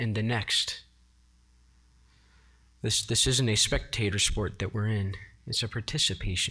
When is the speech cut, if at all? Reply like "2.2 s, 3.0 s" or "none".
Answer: none